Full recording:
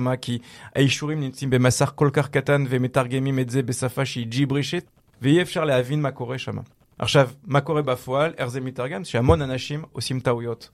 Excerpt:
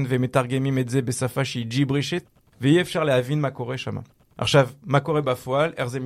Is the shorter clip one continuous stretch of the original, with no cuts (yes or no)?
yes